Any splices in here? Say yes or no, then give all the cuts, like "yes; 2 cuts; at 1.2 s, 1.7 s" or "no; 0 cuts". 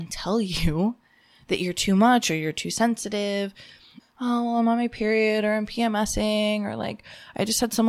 yes; 1 cut; at 4.0 s